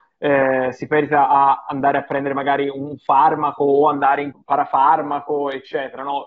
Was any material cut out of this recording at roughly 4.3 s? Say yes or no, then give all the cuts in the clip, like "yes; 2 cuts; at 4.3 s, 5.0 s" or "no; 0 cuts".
yes; 1 cut; at 4.3 s